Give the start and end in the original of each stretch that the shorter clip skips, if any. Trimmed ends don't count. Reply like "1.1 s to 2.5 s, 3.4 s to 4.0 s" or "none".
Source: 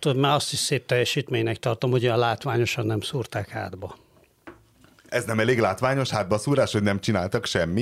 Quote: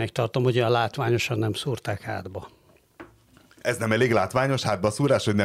none